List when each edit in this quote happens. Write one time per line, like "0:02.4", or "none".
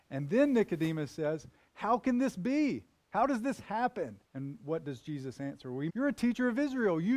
0:04.2
0:05.9